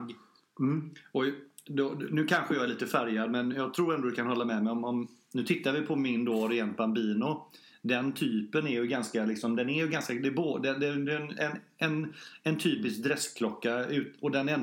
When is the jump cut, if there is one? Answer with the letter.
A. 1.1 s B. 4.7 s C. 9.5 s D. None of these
D